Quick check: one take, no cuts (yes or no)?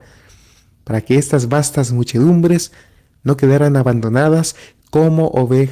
yes